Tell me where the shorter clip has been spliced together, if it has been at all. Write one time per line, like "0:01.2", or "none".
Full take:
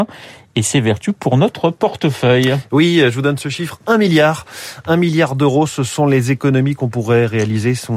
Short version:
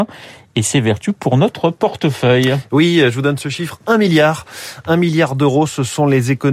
none